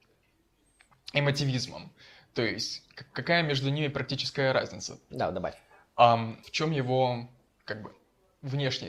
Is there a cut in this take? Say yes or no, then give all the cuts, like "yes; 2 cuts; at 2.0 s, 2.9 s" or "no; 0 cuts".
yes; 2 cuts; at 5.1 s, 6.4 s